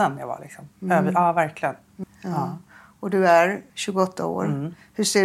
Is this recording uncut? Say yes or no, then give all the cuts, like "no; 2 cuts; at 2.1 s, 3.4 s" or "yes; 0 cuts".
no; 2 cuts; at 2.0 s, 3.7 s